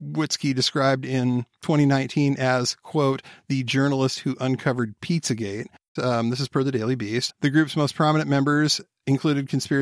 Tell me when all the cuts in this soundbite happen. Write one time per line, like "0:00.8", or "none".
0:06.0
0:07.3